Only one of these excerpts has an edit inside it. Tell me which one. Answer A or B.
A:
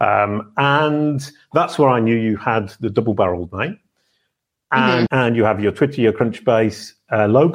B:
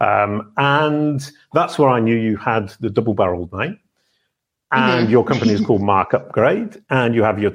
A